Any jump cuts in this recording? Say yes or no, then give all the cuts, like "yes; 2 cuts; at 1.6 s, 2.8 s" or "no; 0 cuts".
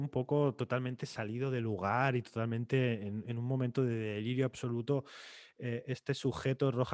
no; 0 cuts